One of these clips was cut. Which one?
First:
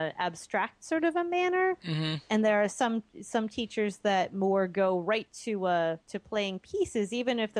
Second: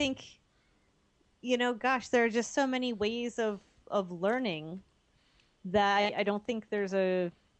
first; 1 cut; at 6.0 s

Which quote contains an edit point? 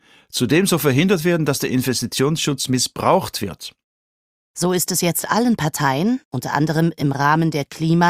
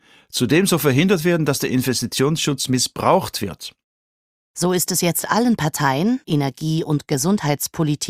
second; 1 cut; at 6.2 s

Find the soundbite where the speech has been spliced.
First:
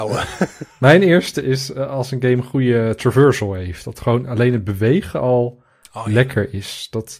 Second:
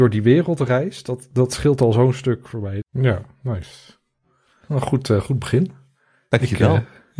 second; 1 cut; at 2.8 s

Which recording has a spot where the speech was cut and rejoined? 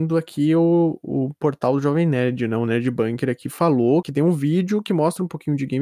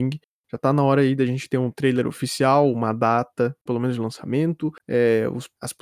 second; 1 cut; at 3.7 s

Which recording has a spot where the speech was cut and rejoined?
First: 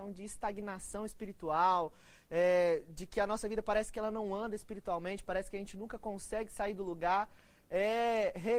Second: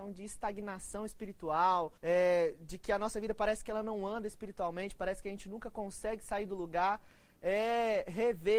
second; 1 cut; at 2.0 s

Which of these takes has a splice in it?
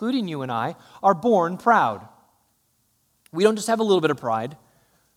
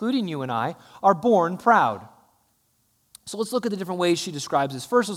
second; 1 cut; at 3.1 s

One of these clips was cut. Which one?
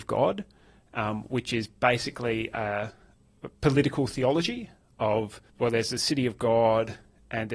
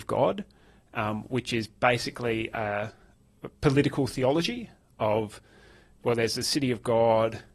first; 1 cut; at 5.5 s

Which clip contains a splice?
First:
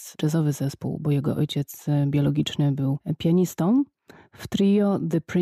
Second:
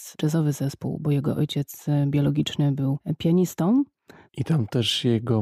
second; 1 cut; at 4.3 s

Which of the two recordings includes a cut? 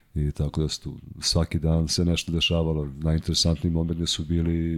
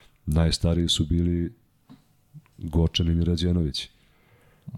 first; 1 cut; at 1.9 s

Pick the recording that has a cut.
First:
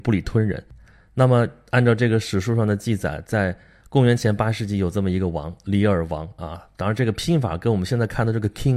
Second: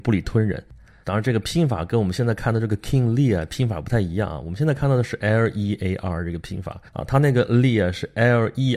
second; 2 cuts; at 1.0 s, 6.9 s

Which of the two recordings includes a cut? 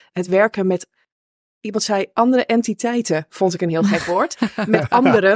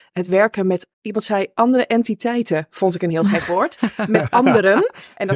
second; 1 cut; at 0.9 s

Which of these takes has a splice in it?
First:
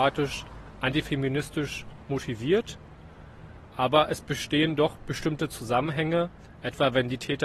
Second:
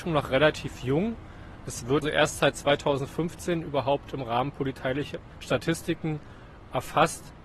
second; 2 cuts; at 2.0 s, 5.3 s

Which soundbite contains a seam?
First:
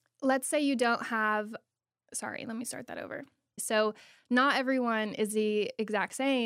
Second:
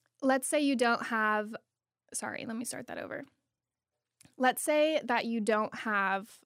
first; 1 cut; at 3.6 s

